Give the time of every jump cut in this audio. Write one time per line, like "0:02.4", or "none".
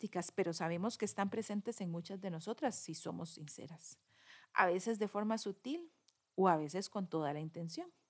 none